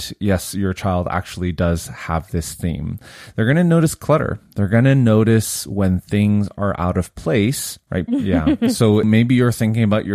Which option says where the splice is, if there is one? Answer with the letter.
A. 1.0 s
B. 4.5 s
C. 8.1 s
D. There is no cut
C